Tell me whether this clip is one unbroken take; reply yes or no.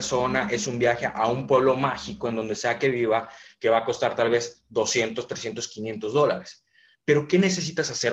yes